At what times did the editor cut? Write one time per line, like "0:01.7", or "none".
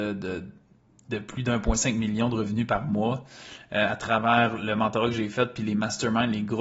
none